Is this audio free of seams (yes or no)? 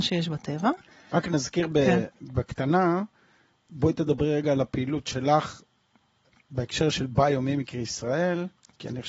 yes